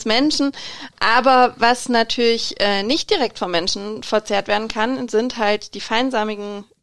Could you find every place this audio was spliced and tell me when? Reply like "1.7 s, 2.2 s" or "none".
none